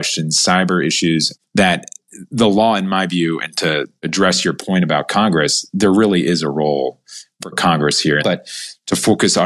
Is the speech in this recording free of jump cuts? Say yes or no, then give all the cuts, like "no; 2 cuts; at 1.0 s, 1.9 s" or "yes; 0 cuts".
no; 1 cut; at 8.2 s